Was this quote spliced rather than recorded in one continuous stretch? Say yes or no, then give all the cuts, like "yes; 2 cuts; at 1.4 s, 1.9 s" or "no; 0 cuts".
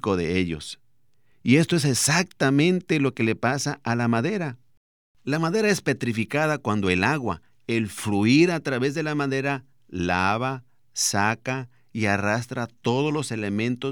no; 0 cuts